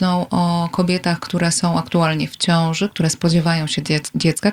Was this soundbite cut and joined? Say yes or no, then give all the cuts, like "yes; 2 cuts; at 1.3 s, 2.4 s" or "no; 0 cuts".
no; 0 cuts